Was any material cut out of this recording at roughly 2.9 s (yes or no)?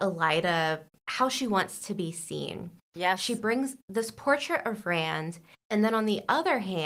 no